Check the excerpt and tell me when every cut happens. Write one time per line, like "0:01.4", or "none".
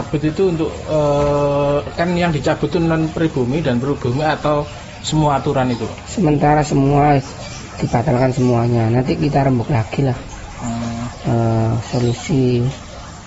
none